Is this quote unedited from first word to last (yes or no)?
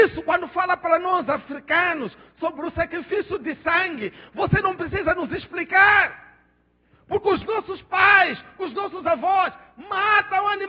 yes